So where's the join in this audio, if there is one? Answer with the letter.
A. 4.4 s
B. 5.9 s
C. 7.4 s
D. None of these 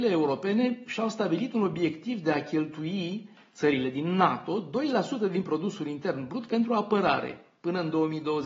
D